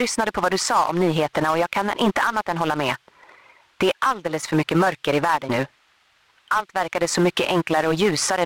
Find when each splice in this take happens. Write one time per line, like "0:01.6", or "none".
0:05.5